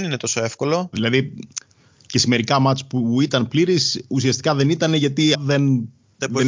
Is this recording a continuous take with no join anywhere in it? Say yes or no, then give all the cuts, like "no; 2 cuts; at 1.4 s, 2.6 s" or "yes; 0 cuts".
no; 2 cuts; at 0.9 s, 5.3 s